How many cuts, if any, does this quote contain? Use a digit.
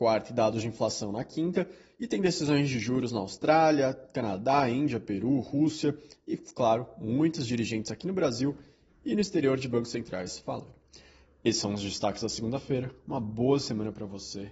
0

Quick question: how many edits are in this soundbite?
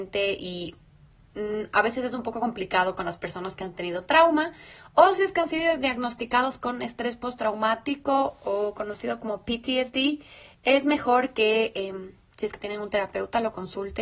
0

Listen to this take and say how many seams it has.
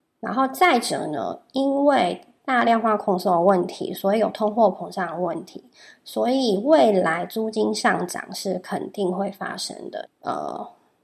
2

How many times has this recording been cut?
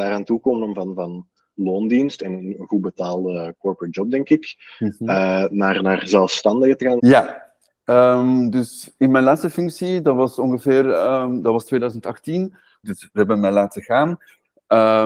2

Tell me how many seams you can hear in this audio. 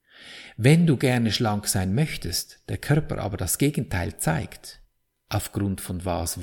0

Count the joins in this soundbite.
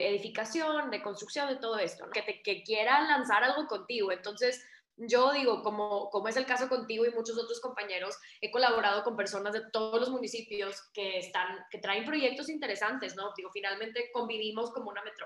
1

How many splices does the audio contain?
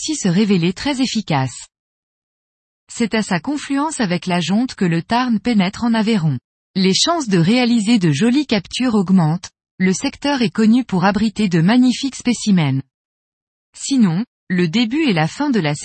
2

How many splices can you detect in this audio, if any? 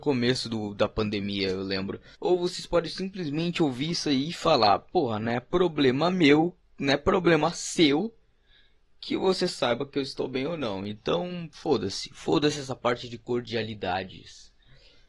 1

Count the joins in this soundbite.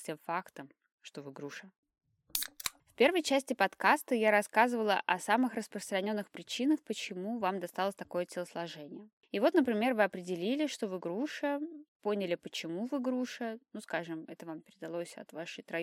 0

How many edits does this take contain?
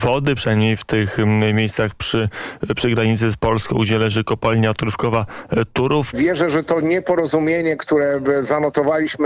2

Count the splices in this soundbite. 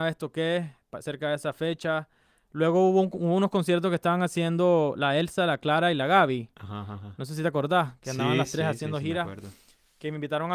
0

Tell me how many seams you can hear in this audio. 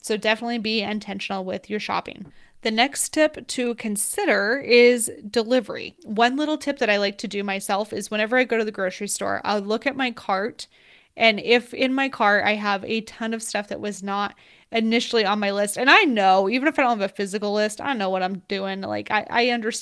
1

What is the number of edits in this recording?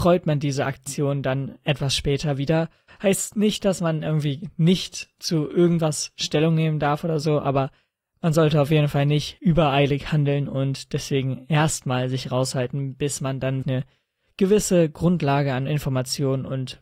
2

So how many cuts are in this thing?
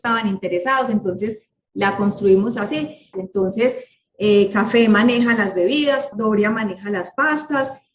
2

